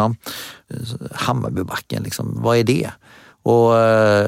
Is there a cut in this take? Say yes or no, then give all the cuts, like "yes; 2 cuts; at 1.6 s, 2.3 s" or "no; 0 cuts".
no; 0 cuts